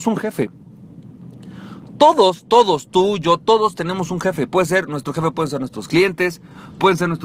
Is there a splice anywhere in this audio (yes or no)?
no